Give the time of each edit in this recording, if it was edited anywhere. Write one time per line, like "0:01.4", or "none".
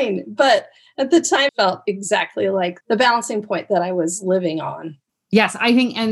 0:01.5
0:02.8